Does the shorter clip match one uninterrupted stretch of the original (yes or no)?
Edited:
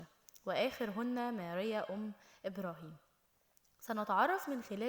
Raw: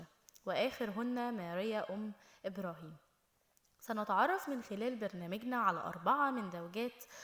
yes